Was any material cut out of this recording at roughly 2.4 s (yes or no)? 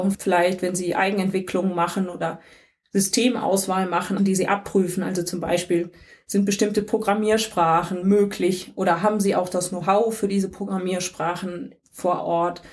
no